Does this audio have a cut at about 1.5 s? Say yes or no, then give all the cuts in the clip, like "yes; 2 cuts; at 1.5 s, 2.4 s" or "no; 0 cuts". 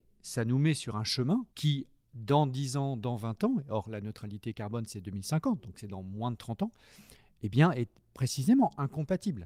yes; 1 cut; at 1.5 s